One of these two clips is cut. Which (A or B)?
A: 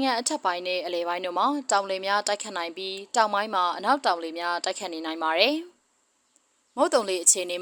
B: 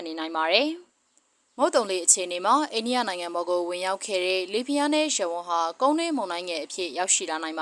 B